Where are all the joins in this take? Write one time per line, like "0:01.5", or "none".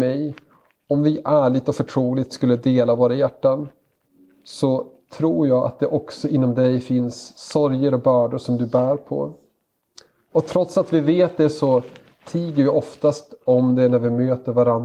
none